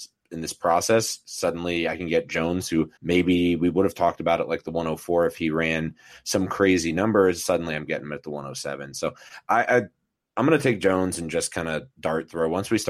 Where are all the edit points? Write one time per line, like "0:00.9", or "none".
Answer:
0:03.0